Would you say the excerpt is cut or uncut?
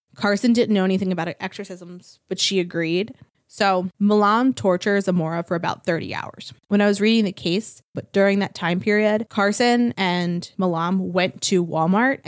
cut